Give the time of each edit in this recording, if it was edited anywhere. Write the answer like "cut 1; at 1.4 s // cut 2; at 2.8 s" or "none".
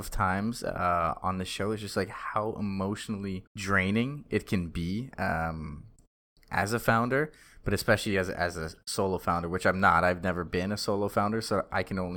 cut 1; at 3.5 s

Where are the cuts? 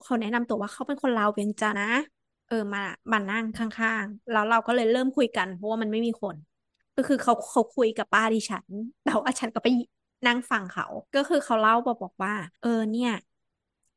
cut 1; at 1.7 s // cut 2; at 11.1 s // cut 3; at 12.6 s

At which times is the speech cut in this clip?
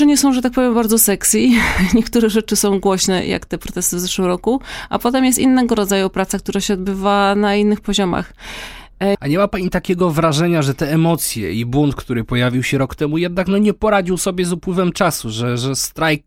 cut 1; at 9.1 s

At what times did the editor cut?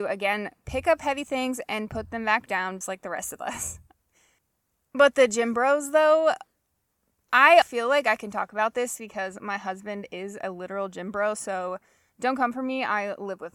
cut 1; at 2.8 s // cut 2; at 7.6 s

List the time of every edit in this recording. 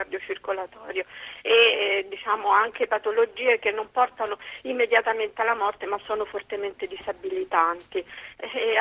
none

